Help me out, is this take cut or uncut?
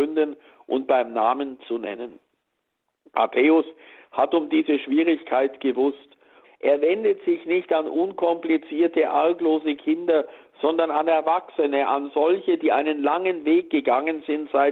cut